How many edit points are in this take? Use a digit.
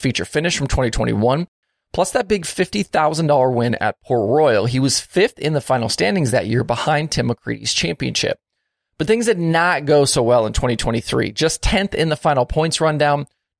0